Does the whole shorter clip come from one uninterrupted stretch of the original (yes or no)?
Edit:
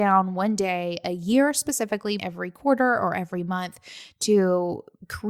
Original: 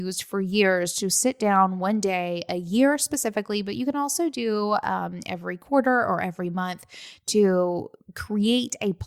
no